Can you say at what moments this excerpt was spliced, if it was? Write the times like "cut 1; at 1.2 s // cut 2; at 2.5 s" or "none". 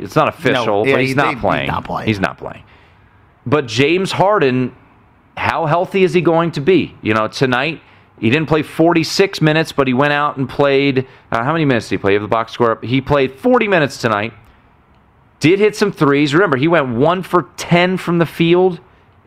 none